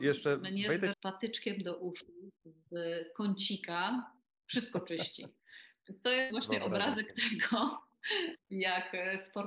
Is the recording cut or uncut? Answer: cut